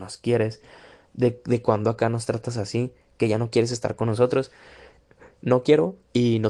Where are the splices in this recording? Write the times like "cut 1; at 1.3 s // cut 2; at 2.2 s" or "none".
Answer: cut 1; at 5.0 s